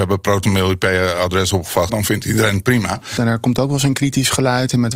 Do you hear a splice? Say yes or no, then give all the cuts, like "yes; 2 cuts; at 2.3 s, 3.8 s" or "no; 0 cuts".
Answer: yes; 2 cuts; at 1.9 s, 3.2 s